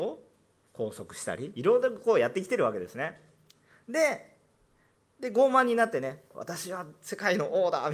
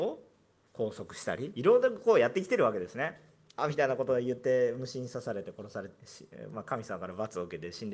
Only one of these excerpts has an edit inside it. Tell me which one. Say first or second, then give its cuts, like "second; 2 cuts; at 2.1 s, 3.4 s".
second; 1 cut; at 3.6 s